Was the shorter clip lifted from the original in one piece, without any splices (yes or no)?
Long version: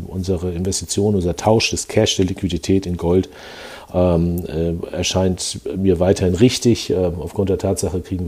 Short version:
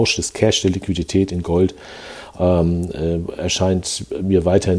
yes